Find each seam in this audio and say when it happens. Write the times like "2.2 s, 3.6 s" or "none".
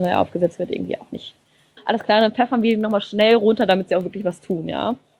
1.8 s